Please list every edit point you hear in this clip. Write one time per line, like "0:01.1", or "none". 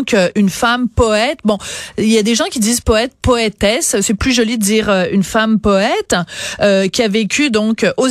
none